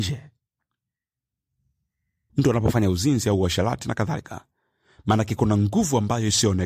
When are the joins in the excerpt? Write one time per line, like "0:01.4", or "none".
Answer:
0:02.3